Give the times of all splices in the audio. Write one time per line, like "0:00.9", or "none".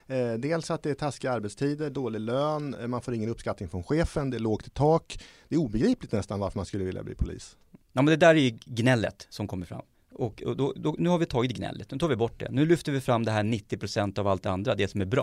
0:11.0